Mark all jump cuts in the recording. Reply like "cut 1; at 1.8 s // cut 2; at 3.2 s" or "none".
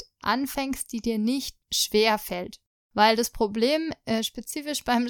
cut 1; at 1.6 s